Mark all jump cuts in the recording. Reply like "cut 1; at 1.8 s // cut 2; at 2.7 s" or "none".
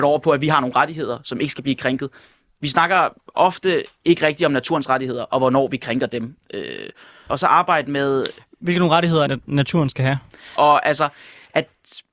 cut 1; at 7.3 s // cut 2; at 9.3 s // cut 3; at 10.6 s